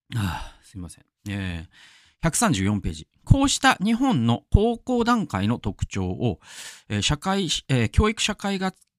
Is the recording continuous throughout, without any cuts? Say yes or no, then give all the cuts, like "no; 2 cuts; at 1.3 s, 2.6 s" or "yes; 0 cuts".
yes; 0 cuts